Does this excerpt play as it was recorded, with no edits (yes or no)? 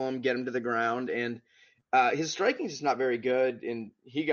yes